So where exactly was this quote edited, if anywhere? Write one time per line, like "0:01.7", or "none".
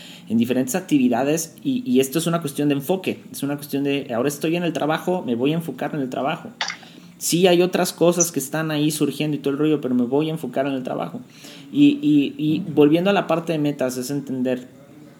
0:04.1